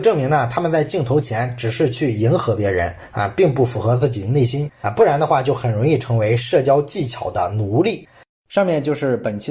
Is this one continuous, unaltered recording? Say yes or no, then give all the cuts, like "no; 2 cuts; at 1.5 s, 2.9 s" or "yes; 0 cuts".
no; 1 cut; at 4.8 s